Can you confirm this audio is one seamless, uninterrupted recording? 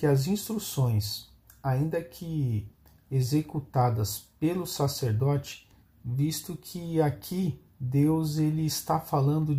no; 2 cuts; at 5.8 s, 7.7 s

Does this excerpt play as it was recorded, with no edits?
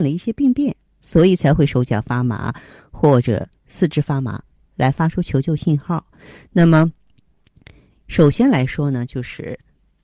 no; 1 cut; at 6.5 s

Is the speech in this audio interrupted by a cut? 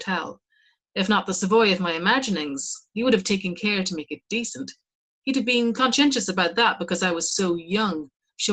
no; 0 cuts

